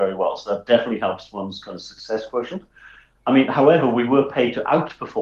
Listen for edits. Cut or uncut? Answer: uncut